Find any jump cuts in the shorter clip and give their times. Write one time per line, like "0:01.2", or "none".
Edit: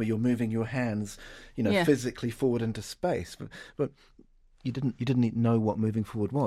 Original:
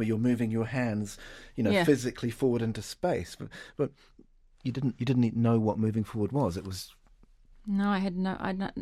none